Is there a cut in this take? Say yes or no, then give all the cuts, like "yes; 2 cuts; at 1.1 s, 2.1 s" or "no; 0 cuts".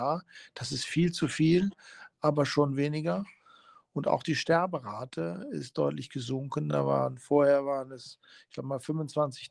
no; 0 cuts